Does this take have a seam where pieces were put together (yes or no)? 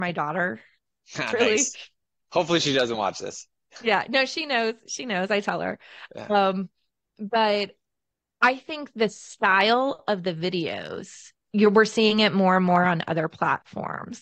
no